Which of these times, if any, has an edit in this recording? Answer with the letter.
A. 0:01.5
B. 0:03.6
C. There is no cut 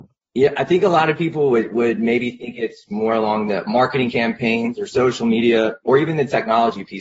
C